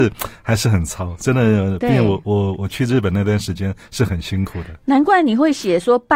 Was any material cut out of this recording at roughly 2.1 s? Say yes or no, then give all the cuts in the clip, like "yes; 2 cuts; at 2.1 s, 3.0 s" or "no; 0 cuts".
no; 0 cuts